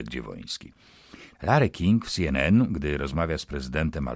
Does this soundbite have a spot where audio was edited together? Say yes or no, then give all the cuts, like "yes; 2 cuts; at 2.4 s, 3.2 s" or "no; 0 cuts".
yes; 1 cut; at 1.3 s